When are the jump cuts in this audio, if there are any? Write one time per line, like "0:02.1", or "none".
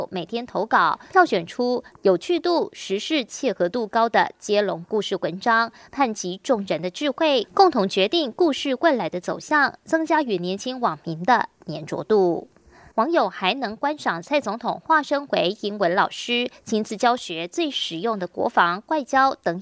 0:12.9

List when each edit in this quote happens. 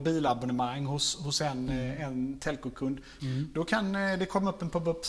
0:03.2

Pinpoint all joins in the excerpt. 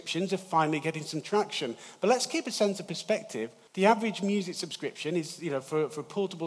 0:03.7

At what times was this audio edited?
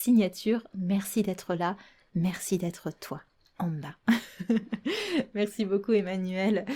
none

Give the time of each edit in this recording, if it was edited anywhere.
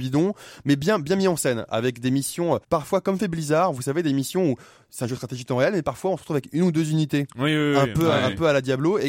0:02.6

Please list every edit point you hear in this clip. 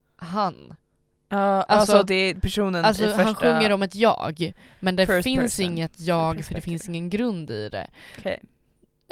none

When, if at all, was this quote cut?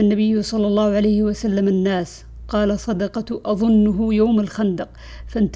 none

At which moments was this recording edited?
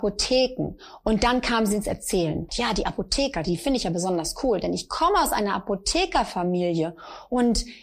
0:02.5

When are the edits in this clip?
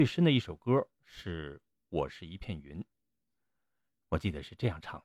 0:04.0

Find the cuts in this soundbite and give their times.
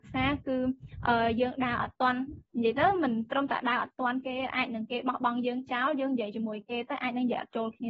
0:02.0

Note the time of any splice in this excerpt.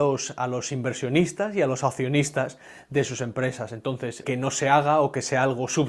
0:04.2

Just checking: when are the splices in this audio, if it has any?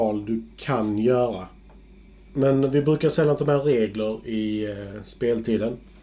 0:02.3

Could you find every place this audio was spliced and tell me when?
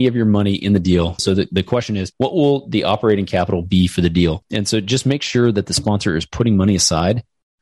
0:01.2

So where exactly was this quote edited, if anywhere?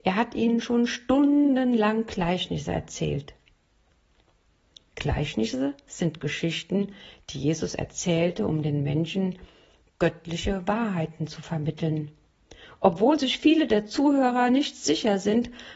none

